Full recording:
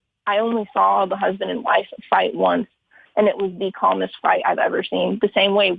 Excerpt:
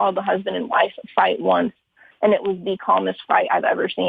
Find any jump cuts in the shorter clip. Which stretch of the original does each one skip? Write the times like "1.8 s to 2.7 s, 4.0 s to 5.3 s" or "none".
none